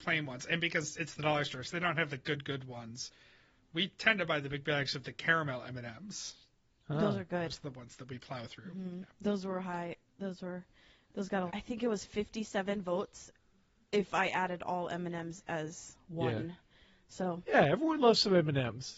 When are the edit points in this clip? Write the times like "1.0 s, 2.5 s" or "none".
11.5 s